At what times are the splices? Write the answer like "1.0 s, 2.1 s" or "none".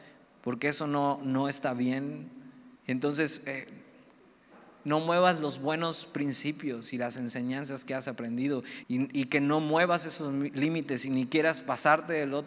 2.8 s, 8.8 s